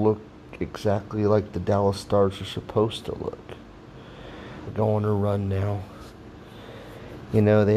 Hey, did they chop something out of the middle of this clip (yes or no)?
yes